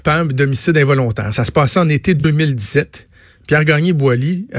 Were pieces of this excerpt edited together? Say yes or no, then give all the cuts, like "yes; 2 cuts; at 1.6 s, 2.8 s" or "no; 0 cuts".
no; 0 cuts